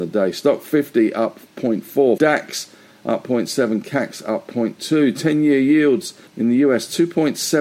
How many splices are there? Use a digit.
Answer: 2